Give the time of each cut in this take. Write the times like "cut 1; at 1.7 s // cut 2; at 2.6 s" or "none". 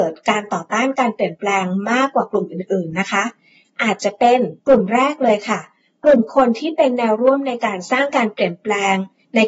cut 1; at 4.6 s